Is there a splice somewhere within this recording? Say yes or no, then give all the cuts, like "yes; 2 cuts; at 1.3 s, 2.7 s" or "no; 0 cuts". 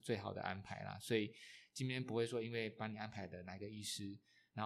no; 0 cuts